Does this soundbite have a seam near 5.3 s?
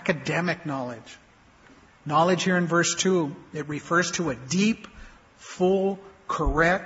no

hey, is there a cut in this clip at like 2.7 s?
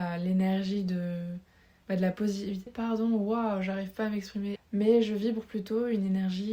yes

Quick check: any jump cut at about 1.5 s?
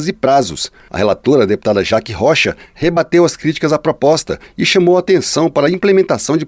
no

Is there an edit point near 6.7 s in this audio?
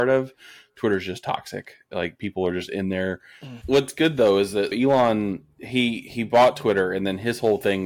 no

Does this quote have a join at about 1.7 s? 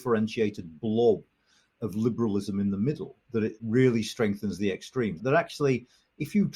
no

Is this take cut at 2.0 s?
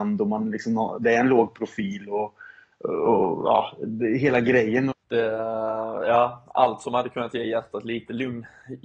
no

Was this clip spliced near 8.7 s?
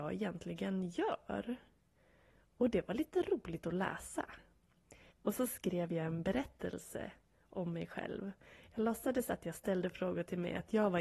no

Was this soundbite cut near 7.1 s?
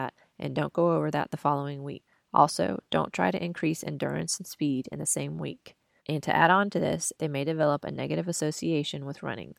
yes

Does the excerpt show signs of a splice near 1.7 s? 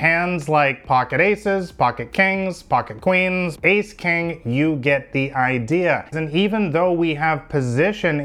no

